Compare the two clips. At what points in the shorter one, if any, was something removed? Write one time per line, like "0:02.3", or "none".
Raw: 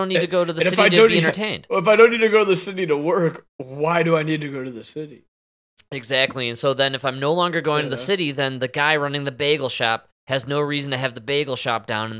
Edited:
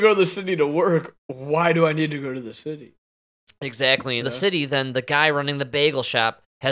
0:04.2